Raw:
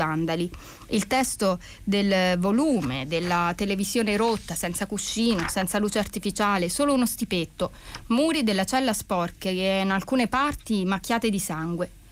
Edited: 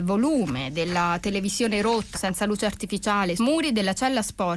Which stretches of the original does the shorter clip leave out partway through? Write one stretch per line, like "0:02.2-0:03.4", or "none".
0:04.5-0:05.5
0:06.7-0:08.1